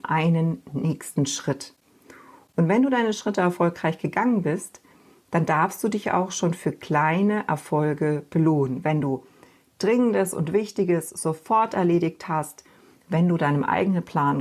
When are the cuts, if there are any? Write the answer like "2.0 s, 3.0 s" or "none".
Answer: none